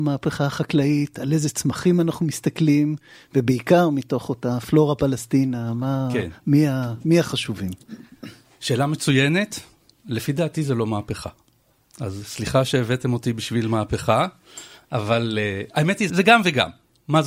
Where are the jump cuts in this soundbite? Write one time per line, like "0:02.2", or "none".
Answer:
0:07.8
0:16.1